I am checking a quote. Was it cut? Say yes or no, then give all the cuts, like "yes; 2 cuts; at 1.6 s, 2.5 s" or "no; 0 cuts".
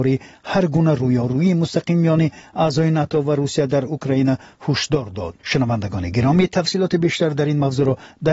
yes; 1 cut; at 5.4 s